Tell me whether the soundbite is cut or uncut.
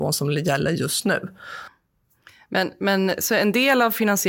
uncut